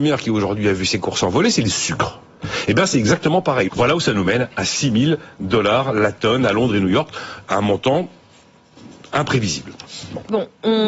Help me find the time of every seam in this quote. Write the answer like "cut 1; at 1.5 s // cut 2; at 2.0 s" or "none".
cut 1; at 3.7 s // cut 2; at 7.5 s